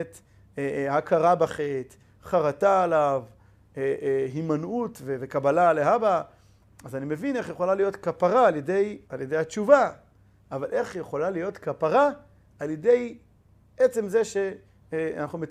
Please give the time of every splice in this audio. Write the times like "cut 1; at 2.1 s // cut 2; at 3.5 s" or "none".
cut 1; at 9.0 s